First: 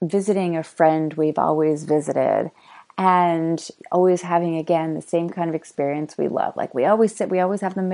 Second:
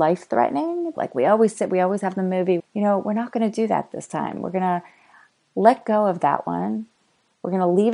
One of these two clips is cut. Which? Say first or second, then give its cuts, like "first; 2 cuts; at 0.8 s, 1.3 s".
second; 2 cuts; at 0.9 s, 2.6 s